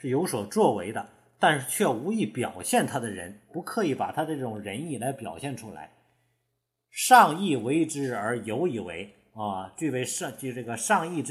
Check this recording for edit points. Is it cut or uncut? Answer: uncut